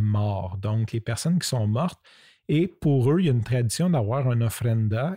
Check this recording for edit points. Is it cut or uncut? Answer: uncut